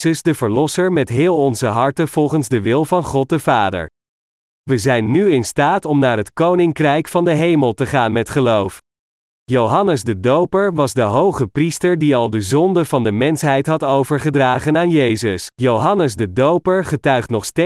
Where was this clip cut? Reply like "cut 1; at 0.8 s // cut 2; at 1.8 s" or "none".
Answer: cut 1; at 9.3 s // cut 2; at 15.5 s

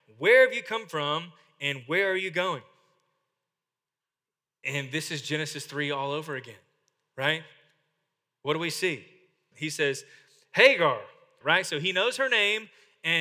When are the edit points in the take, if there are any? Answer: cut 1; at 9.5 s // cut 2; at 11.4 s

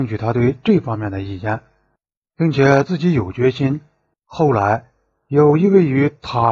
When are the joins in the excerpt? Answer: cut 1; at 4.1 s

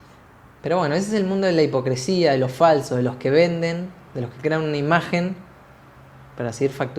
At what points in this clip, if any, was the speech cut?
none

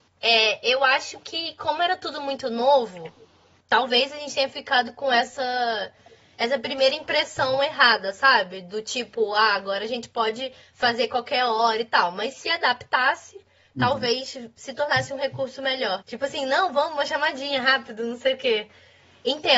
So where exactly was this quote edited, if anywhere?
cut 1; at 16.0 s

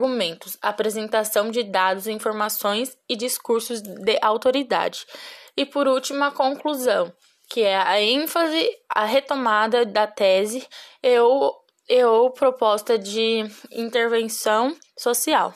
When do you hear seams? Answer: none

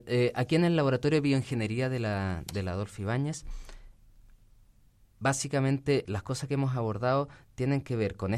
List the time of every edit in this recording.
cut 1; at 6.0 s

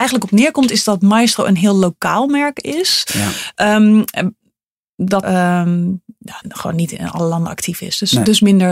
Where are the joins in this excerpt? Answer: cut 1; at 5.2 s // cut 2; at 6.4 s

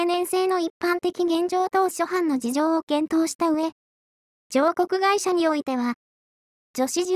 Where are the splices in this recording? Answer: none

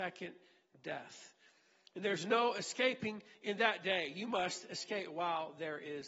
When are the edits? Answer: none

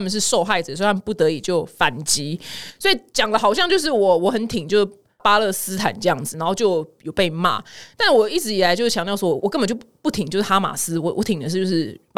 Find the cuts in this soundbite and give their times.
cut 1; at 9.4 s

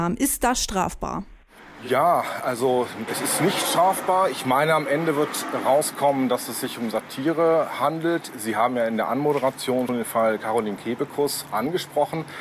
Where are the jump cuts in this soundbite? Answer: cut 1; at 3.1 s // cut 2; at 9.9 s

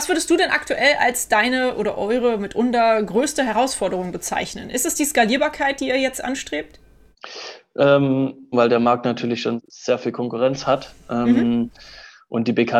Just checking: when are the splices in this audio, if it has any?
cut 1; at 8.5 s

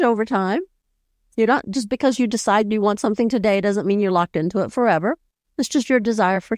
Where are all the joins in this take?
none

